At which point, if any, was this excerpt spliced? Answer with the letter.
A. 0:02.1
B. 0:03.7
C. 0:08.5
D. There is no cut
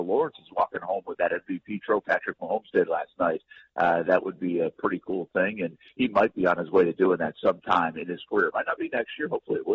A